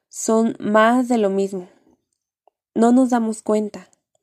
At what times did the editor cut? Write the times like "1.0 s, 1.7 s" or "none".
none